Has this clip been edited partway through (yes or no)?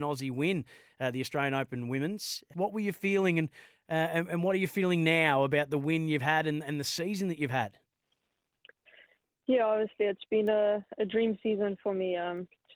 yes